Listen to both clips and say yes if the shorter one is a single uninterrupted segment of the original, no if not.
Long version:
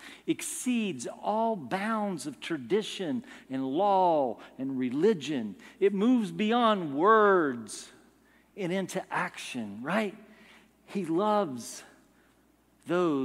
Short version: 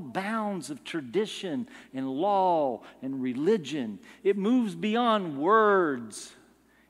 yes